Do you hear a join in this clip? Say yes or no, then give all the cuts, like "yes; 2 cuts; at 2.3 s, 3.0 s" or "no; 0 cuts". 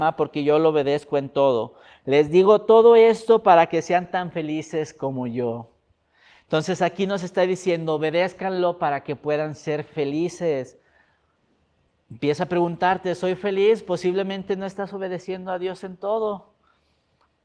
no; 0 cuts